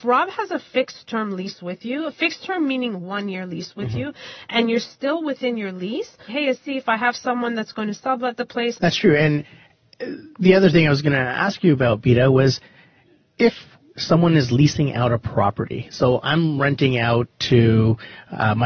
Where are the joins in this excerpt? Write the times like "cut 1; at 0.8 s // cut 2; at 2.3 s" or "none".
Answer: cut 1; at 6.3 s // cut 2; at 8.8 s